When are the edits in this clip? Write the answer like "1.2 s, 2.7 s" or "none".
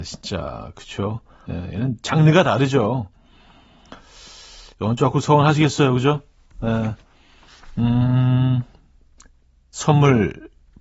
1.4 s

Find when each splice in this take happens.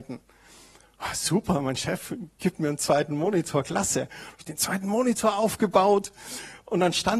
none

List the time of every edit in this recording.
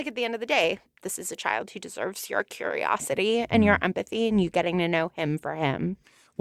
1.0 s

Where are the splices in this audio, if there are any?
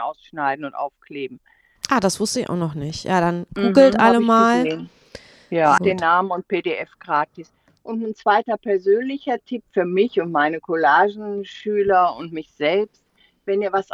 5.8 s

